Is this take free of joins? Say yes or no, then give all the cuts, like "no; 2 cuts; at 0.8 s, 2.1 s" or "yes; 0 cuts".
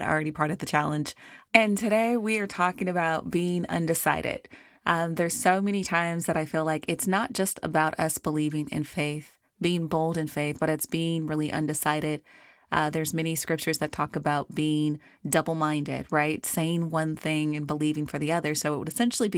no; 1 cut; at 1.5 s